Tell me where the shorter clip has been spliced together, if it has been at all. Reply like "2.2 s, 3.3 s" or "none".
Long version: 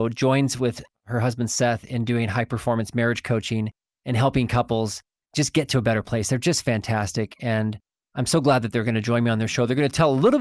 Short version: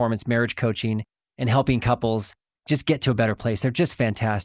none